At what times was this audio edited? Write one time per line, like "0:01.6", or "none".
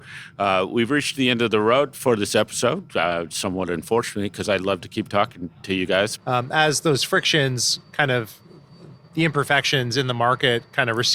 0:06.2
0:08.9

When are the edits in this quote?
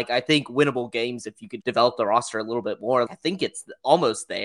0:01.6
0:03.1

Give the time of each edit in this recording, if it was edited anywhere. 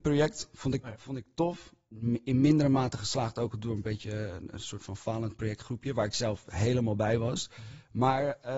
none

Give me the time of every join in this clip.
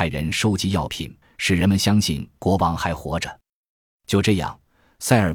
0:01.2
0:03.6

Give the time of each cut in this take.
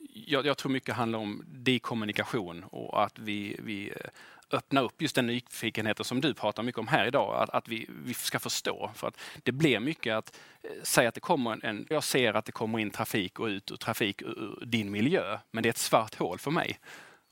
0:11.9

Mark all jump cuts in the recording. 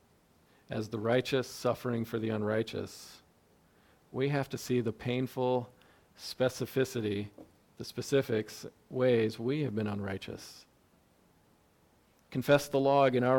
none

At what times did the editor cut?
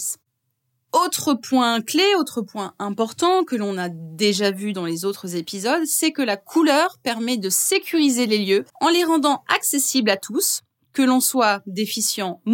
0:08.7

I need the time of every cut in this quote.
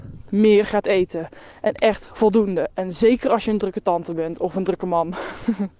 none

